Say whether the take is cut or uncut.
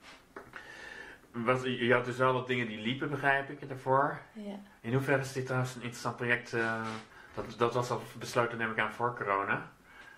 uncut